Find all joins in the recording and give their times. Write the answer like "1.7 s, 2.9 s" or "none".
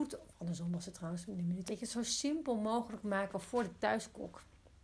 1.7 s